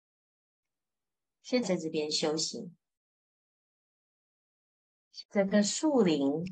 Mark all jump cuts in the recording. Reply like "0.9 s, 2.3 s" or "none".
1.6 s, 5.2 s